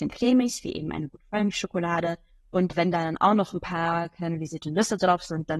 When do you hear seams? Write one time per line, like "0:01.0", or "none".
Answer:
none